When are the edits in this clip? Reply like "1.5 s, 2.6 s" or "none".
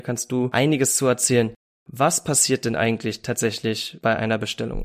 none